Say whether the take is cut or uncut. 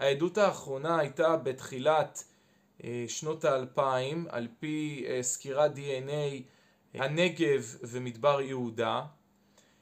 cut